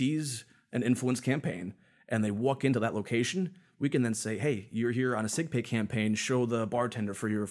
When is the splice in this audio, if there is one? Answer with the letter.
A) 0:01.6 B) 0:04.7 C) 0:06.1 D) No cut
D